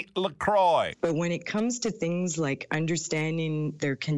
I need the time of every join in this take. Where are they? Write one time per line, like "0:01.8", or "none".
0:00.9